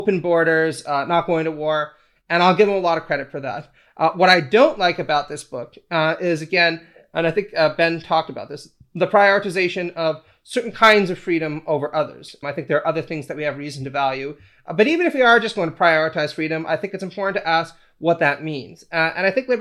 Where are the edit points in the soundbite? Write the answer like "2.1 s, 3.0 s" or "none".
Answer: 12.4 s